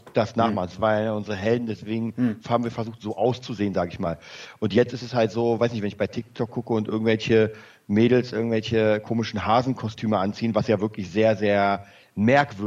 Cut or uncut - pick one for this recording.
uncut